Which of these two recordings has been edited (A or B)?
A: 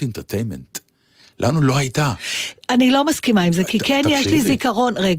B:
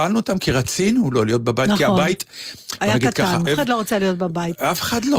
B